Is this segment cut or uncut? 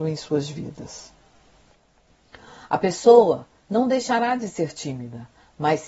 uncut